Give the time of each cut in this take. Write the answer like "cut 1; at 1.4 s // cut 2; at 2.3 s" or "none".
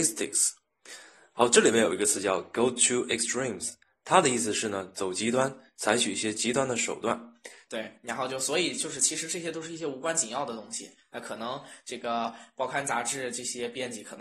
cut 1; at 7.7 s